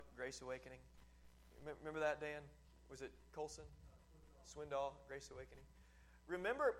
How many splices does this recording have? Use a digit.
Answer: 0